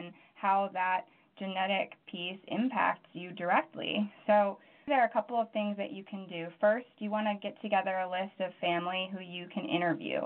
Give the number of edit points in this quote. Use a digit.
1